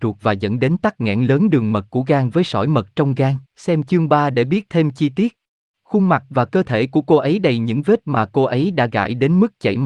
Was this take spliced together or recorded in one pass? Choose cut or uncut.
cut